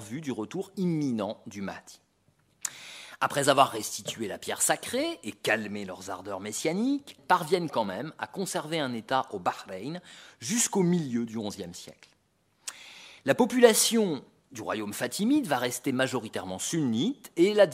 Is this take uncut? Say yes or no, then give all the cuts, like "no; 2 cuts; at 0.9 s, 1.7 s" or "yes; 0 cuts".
no; 2 cuts; at 7.2 s, 13.2 s